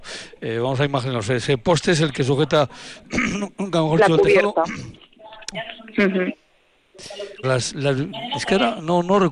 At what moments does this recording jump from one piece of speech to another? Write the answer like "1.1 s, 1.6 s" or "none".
5.5 s, 7.4 s